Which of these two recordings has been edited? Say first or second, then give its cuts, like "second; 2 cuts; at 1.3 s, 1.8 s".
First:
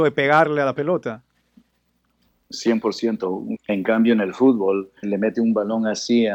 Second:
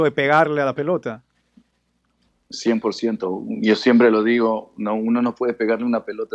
first; 2 cuts; at 3.6 s, 5.0 s